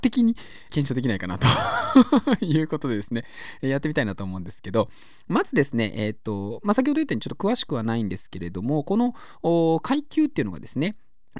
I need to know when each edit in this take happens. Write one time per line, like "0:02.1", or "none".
none